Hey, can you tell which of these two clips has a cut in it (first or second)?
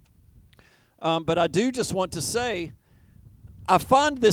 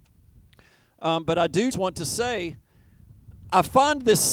second